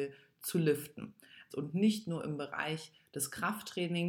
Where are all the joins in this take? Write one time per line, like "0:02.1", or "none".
0:01.5